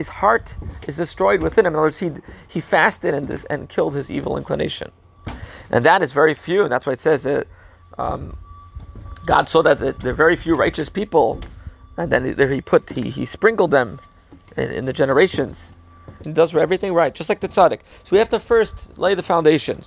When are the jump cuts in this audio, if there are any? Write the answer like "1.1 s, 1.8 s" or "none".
16.2 s, 17.9 s